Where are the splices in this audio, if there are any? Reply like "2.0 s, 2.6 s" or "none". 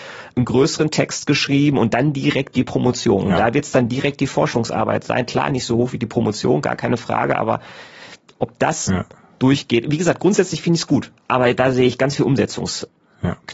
8.9 s